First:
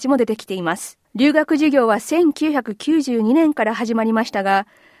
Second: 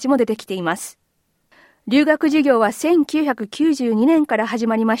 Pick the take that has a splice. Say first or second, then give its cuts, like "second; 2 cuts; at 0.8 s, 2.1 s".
first; 1 cut; at 1.0 s